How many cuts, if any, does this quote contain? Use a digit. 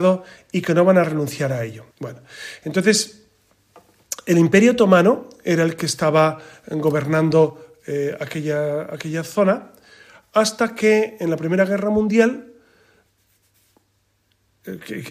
1